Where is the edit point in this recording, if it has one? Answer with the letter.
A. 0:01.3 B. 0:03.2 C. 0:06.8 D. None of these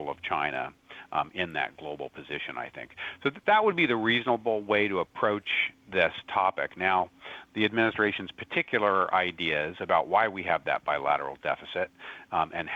D